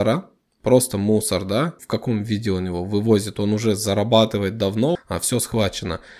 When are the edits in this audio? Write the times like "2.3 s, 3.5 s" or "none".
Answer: 1.8 s, 5.0 s